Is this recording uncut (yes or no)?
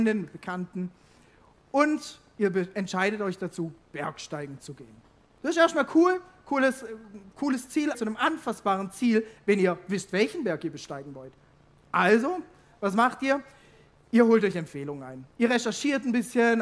no